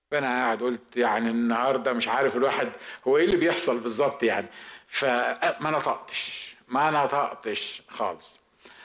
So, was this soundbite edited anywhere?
no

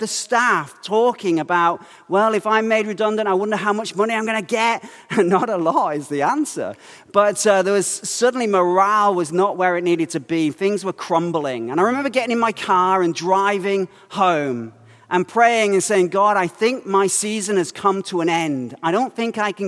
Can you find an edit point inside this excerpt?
no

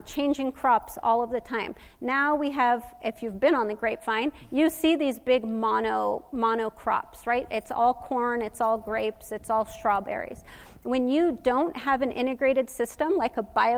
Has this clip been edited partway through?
no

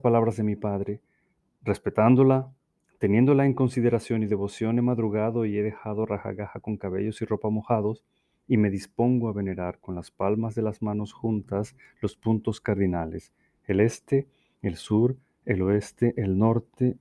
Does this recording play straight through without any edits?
yes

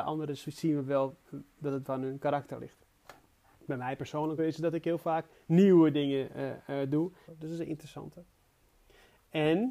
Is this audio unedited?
no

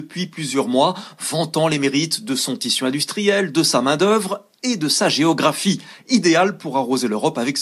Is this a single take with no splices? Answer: yes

